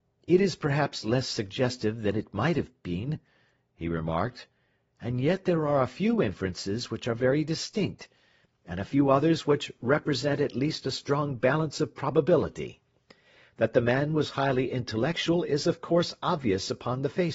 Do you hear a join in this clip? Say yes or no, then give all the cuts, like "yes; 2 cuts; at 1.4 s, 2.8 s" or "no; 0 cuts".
no; 0 cuts